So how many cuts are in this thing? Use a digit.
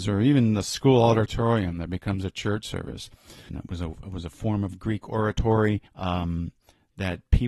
2